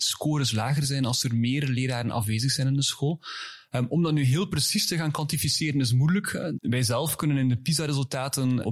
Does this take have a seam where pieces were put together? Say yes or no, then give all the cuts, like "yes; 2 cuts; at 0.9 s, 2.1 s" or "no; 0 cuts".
yes; 1 cut; at 6.6 s